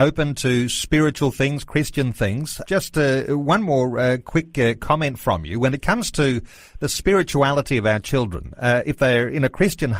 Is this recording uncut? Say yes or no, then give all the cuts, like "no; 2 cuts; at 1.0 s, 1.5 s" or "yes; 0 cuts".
no; 1 cut; at 2.6 s